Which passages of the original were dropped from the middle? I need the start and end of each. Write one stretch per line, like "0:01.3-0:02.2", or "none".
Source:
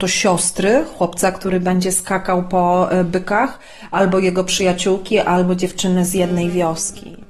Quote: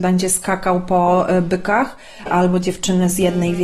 0:03.9-0:05.2